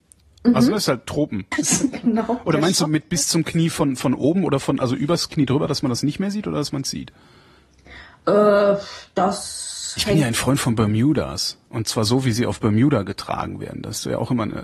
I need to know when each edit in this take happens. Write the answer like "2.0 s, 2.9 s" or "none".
1.5 s